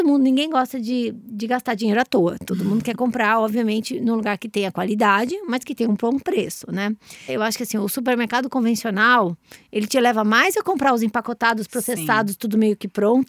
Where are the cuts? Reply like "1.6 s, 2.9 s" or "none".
7.3 s